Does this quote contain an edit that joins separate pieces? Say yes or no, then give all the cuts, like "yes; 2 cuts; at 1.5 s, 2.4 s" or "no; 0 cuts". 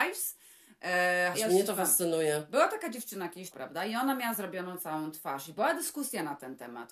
yes; 2 cuts; at 1.3 s, 3.5 s